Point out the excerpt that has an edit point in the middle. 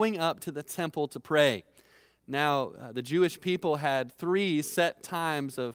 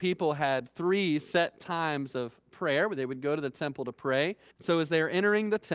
second; 1 cut; at 4.5 s

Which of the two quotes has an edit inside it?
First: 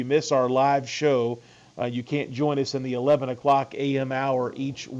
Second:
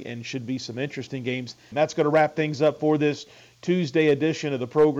second; 1 cut; at 1.7 s

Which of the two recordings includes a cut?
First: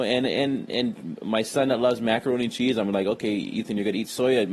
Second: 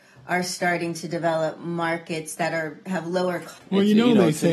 second; 1 cut; at 3.6 s

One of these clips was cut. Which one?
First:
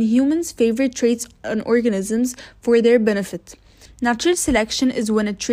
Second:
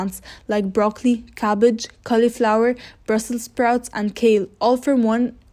first; 1 cut; at 3.9 s

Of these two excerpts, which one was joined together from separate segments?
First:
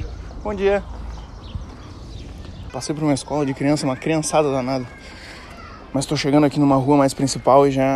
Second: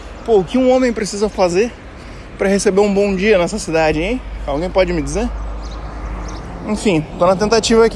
first; 1 cut; at 2.7 s

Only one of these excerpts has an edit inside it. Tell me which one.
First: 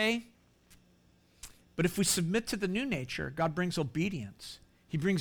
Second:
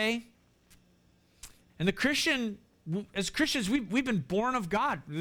second; 1 cut; at 1.7 s

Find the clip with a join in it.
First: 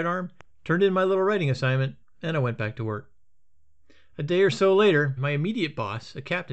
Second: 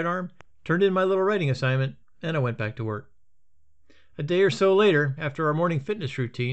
first; 1 cut; at 5.2 s

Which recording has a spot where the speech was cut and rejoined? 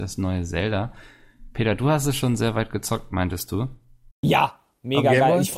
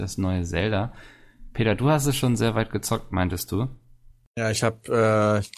first; 1 cut; at 4.1 s

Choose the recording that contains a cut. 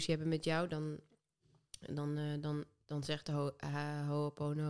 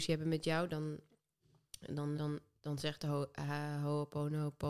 second; 1 cut; at 2.2 s

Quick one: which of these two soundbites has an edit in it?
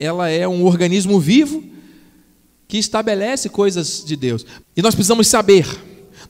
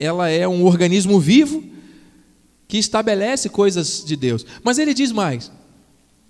first; 1 cut; at 4.6 s

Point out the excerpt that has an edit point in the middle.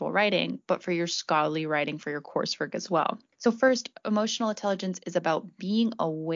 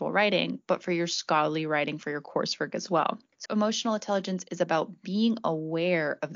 second; 1 cut; at 3.5 s

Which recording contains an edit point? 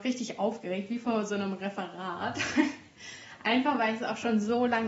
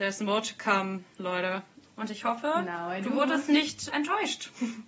second; 2 cuts; at 1.8 s, 3.9 s

